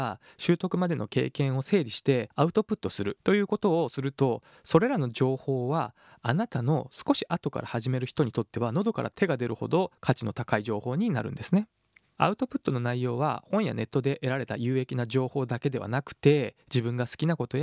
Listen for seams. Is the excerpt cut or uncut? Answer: uncut